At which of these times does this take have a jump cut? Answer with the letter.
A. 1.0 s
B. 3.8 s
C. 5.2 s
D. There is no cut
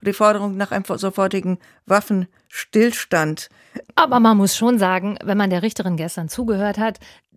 B